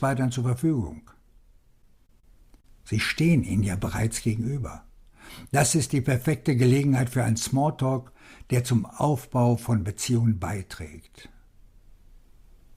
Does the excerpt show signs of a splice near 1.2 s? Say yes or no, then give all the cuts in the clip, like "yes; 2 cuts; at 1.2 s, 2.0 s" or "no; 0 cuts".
no; 0 cuts